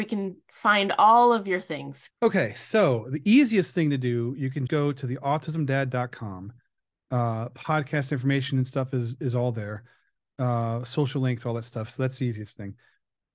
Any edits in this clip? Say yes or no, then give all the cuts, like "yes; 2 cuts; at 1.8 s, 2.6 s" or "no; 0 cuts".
yes; 2 cuts; at 2.1 s, 4.7 s